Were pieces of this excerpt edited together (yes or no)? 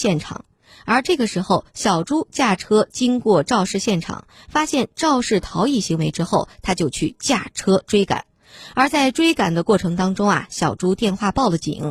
no